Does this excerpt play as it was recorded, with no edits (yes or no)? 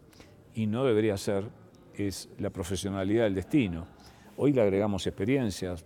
no